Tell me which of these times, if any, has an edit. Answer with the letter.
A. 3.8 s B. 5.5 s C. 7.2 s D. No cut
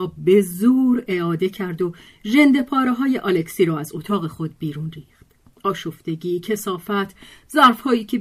B